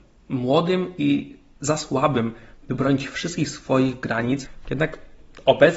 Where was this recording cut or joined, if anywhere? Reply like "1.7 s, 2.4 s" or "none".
4.6 s